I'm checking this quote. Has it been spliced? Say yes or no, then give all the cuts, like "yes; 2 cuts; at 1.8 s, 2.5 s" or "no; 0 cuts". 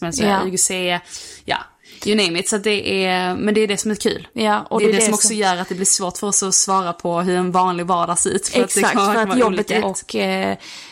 yes; 1 cut; at 9.8 s